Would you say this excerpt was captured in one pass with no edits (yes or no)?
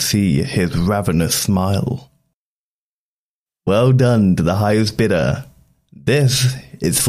yes